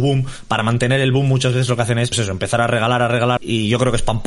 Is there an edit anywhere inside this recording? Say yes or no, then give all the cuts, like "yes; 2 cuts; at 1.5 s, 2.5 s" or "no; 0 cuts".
yes; 2 cuts; at 2.1 s, 3.4 s